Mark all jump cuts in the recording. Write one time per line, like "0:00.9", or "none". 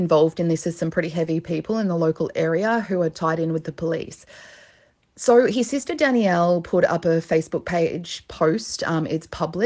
none